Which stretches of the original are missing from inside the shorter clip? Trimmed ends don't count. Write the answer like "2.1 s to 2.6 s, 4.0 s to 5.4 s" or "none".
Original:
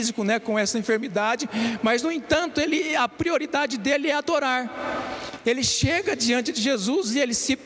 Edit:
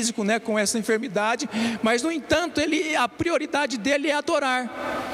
none